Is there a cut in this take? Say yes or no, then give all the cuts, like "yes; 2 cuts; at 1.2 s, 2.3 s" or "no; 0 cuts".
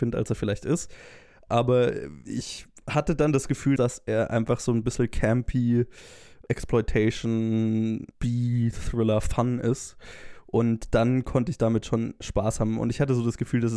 yes; 1 cut; at 3.8 s